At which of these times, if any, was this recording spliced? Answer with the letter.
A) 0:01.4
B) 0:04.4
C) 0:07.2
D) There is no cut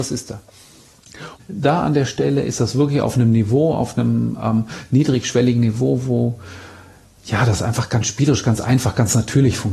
A